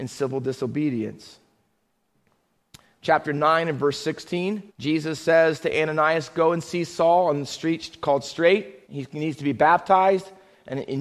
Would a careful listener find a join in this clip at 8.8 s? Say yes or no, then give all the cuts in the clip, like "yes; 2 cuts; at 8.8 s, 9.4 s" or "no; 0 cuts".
yes; 2 cuts; at 4.7 s, 8.8 s